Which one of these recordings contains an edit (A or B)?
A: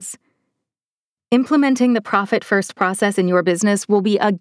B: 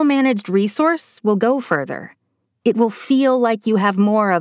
A